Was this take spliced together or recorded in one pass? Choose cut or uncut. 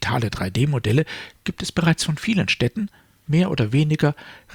cut